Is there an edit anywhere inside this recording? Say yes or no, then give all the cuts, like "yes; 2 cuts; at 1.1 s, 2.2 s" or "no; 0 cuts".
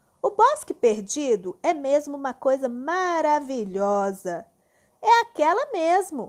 yes; 1 cut; at 4.9 s